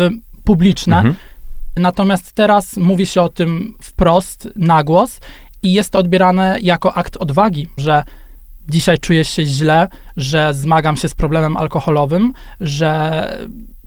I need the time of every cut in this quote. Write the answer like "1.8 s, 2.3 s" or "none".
1.8 s, 7.8 s